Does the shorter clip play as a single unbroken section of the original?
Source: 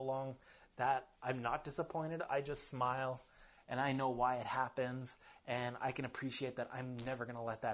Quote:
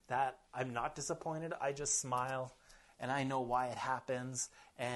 yes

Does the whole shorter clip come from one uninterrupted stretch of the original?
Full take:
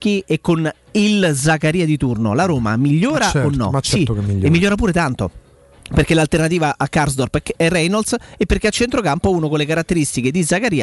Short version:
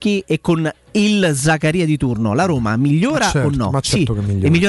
yes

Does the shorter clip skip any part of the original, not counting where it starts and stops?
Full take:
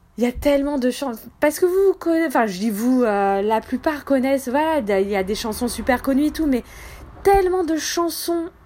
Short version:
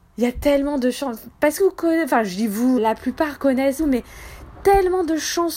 yes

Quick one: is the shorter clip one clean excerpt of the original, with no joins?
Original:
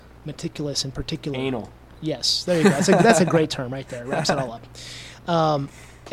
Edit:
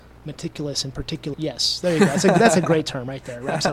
no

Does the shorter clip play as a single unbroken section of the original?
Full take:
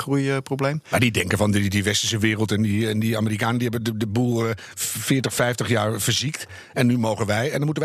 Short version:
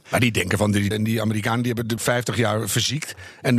no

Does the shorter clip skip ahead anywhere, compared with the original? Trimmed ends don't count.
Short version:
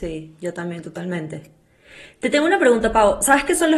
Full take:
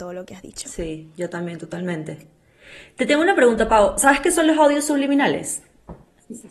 no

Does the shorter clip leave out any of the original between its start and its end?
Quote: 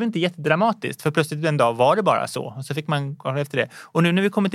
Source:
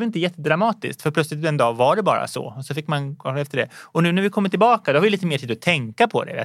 no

